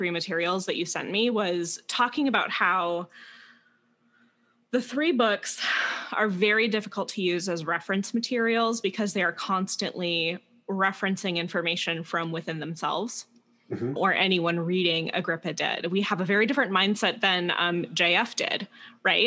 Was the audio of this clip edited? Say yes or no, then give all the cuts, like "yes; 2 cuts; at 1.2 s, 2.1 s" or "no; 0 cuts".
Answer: yes; 1 cut; at 14.0 s